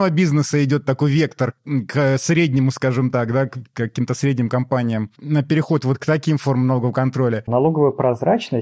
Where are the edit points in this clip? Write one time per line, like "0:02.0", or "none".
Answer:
0:07.5